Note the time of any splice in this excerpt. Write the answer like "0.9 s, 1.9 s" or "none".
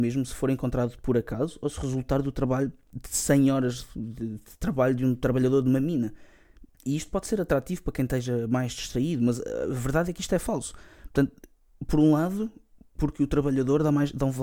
6.7 s